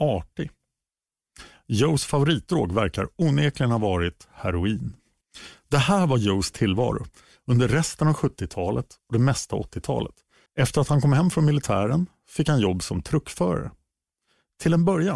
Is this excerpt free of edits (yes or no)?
no